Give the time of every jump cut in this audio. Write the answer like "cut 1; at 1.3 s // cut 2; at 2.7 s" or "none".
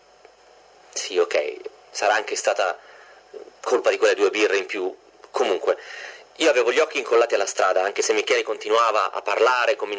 none